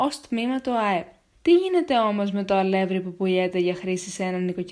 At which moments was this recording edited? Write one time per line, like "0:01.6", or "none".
0:01.3